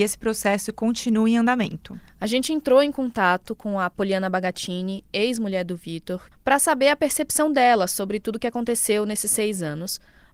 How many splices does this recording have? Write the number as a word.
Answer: one